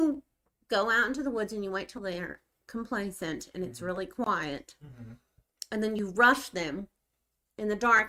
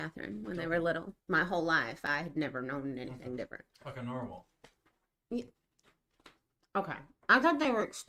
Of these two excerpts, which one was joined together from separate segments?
second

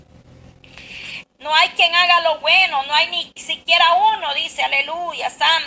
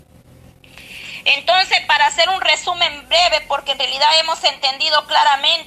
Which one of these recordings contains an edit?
first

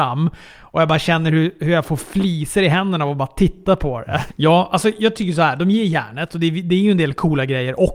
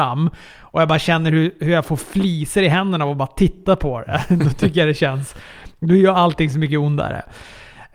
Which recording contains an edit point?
first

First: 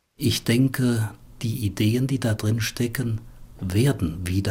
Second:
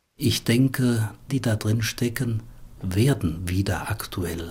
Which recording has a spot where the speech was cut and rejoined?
second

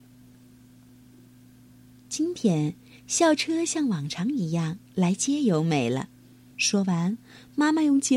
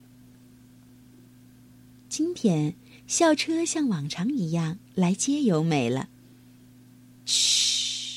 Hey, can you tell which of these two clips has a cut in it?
first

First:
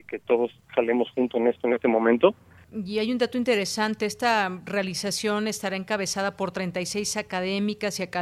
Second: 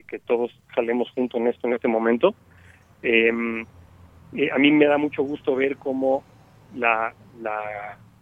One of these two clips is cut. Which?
first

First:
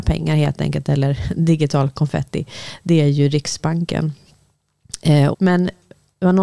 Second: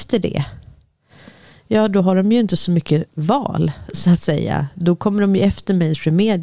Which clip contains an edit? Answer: first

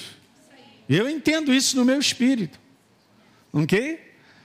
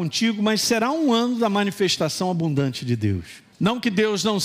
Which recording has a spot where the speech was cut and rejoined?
second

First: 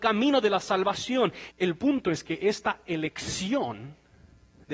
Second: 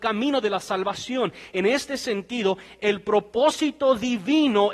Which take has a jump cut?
first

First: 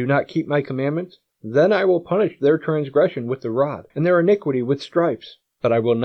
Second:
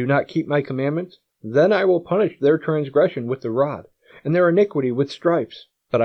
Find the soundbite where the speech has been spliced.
first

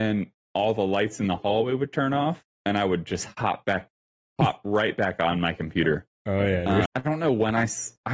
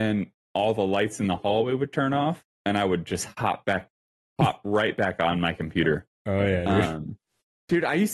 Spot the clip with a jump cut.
first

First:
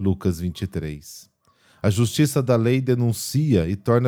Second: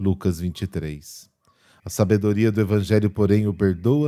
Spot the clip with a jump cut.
second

